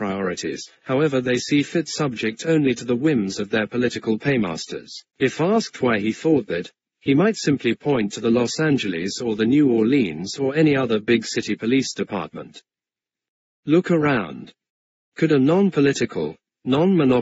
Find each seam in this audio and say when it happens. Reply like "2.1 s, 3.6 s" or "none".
5.1 s, 13.5 s